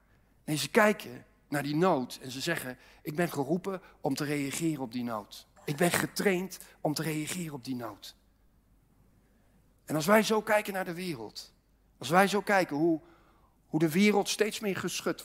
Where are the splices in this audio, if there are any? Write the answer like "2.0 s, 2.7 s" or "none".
5.6 s